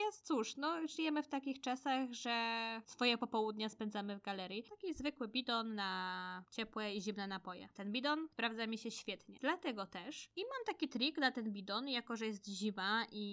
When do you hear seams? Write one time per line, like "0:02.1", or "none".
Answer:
0:04.7